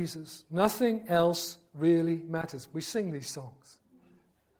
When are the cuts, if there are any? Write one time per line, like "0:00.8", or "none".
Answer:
none